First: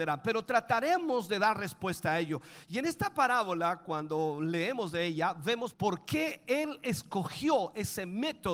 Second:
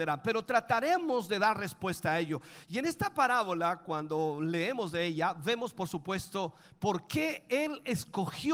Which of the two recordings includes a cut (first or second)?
first